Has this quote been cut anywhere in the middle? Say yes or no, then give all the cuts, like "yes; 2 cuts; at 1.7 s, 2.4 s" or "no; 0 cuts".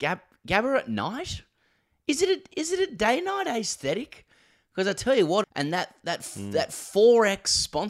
yes; 1 cut; at 5.4 s